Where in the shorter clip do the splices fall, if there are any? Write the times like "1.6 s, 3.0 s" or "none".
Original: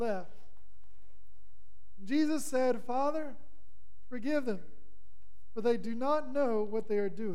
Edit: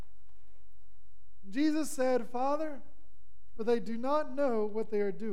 3.5 s